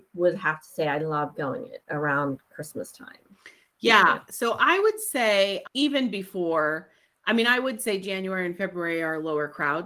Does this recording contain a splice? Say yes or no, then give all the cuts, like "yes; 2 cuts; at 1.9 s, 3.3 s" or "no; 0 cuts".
no; 0 cuts